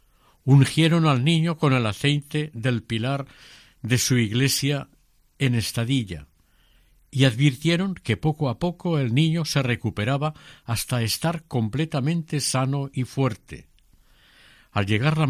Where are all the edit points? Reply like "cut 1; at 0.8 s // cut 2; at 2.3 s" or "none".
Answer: none